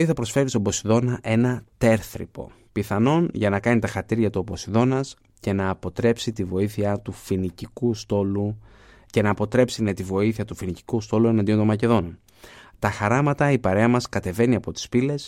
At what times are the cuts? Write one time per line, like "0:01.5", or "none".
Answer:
0:02.7